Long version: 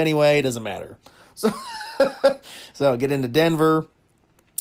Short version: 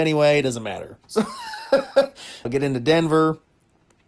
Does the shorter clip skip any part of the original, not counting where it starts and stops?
yes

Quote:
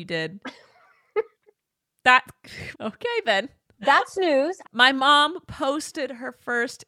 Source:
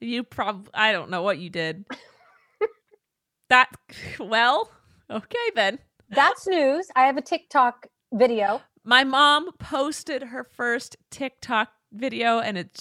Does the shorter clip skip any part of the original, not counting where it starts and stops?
yes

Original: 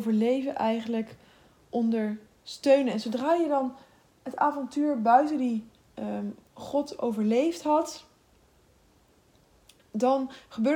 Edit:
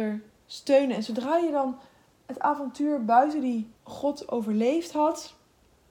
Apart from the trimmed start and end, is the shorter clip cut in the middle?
yes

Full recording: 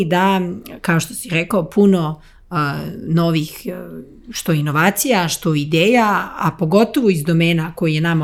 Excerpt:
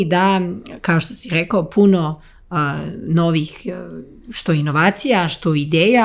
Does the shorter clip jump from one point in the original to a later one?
no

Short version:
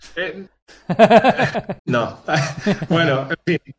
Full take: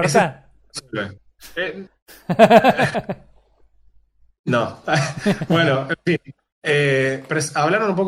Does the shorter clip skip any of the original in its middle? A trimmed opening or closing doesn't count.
yes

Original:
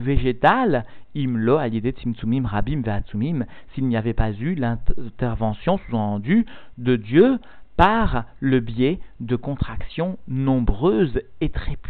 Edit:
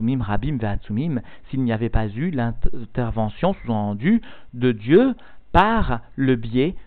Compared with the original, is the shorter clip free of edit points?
yes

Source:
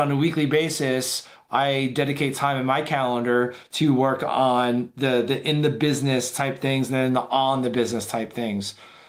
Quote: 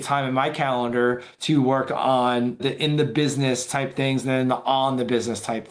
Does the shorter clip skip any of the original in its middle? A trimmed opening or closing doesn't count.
yes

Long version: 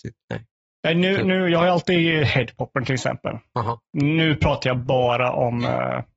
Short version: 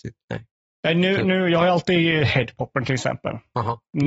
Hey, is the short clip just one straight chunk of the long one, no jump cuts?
yes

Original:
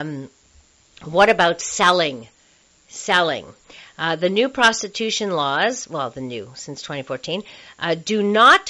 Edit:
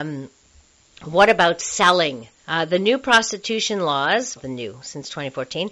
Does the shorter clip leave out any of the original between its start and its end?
yes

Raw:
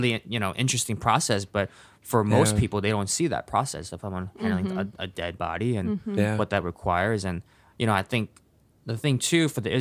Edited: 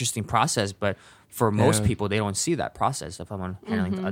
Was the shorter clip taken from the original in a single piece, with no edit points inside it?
yes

